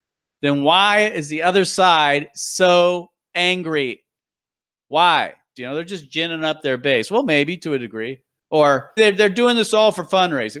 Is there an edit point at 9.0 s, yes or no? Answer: yes